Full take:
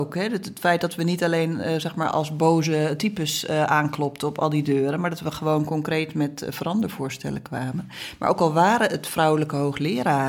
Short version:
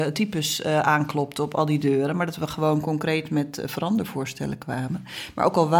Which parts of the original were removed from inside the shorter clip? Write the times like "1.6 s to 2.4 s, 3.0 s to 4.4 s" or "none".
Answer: none